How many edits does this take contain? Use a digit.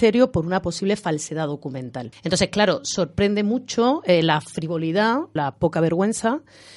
2